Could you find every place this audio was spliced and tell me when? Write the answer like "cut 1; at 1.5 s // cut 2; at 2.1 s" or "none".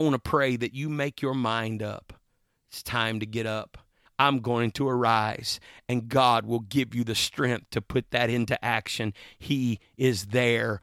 cut 1; at 4.1 s